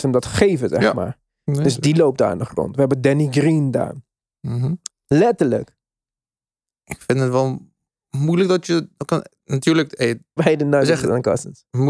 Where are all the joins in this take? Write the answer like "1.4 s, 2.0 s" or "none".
4.9 s, 10.4 s